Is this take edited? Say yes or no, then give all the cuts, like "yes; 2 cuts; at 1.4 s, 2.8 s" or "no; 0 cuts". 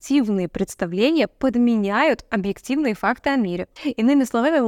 yes; 1 cut; at 3.8 s